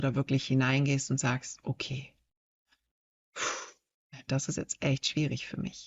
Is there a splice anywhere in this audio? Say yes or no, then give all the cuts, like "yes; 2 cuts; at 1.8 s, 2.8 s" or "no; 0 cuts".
yes; 1 cut; at 4.3 s